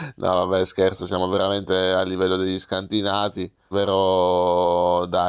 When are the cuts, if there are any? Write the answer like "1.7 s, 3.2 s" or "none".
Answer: 3.7 s